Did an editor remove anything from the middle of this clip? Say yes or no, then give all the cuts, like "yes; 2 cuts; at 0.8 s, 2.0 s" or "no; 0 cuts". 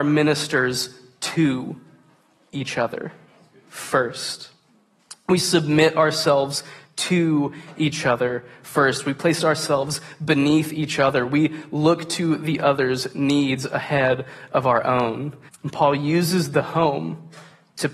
yes; 1 cut; at 15.5 s